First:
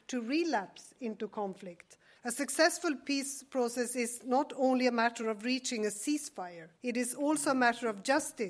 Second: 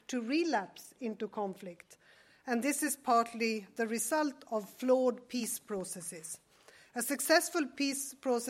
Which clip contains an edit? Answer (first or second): first